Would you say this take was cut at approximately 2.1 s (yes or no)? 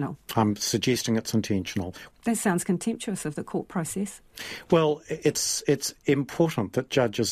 yes